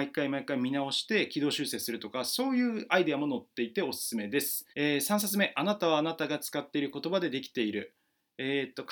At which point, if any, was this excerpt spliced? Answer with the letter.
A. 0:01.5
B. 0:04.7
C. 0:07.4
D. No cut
B